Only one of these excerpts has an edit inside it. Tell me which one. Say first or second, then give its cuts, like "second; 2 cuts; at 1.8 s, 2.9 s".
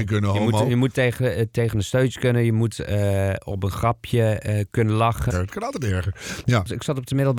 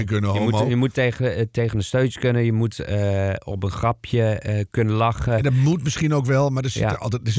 first; 1 cut; at 5.3 s